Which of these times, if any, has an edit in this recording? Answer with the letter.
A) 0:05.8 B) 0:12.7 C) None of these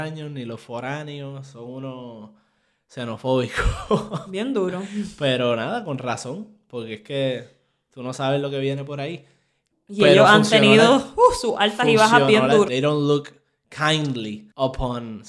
B